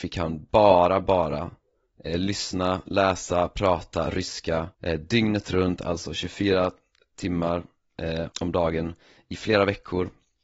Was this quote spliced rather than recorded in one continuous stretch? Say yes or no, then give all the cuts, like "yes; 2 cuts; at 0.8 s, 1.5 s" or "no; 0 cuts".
yes; 2 cuts; at 4.7 s, 8.3 s